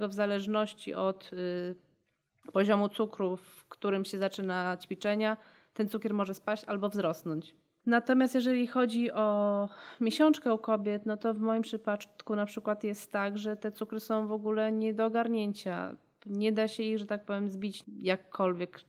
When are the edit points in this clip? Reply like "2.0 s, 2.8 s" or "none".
none